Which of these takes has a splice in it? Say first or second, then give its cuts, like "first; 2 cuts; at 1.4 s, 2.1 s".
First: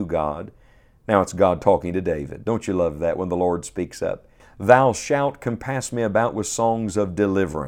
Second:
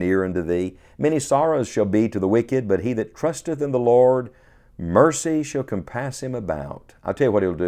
first; 1 cut; at 4.4 s